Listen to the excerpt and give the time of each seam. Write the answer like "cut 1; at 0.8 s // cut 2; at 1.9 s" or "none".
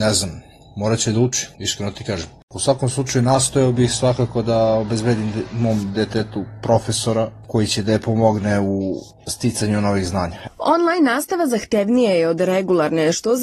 cut 1; at 1.5 s // cut 2; at 10.5 s